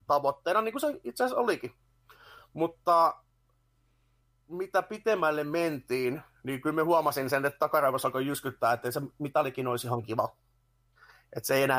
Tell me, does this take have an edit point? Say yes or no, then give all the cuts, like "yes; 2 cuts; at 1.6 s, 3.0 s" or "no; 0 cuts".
no; 0 cuts